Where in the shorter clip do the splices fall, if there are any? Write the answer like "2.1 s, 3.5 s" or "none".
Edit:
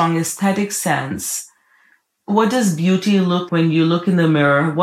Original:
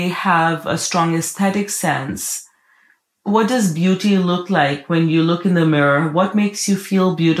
3.5 s

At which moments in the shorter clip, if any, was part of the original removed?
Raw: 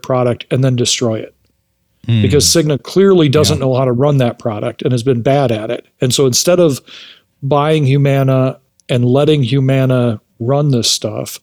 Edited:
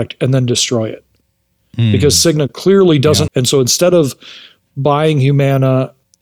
3.3 s

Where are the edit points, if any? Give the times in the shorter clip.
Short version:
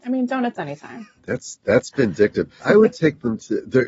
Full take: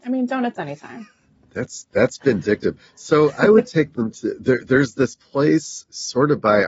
1.2 s, 2.6 s

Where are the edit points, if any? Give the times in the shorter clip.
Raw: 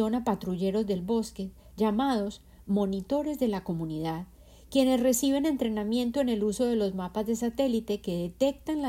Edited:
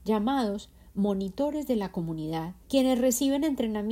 2.6 s

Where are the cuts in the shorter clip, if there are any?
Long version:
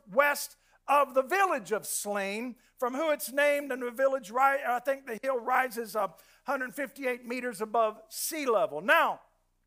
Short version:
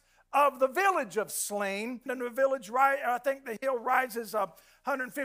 2.1 s

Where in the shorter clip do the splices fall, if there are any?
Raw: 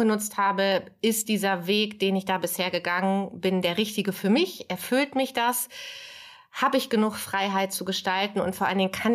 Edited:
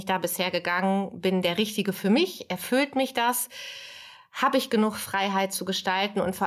none

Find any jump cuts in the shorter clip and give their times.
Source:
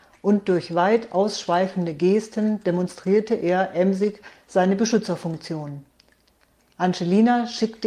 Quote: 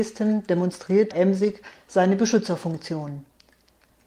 1.1 s

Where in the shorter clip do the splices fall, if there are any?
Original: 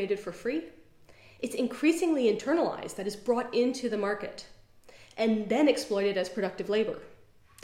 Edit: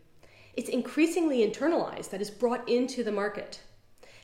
none

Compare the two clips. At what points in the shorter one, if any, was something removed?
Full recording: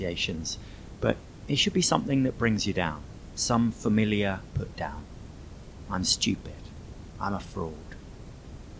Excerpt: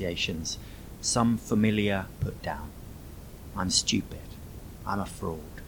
1.0 s

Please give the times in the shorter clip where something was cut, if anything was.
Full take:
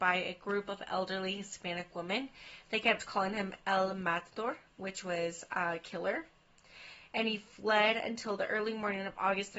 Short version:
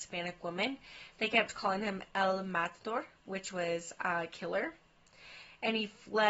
none

